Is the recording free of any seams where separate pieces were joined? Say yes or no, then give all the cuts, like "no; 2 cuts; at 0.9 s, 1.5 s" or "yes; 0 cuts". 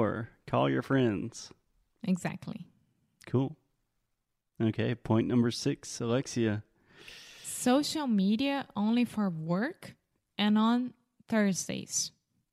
yes; 0 cuts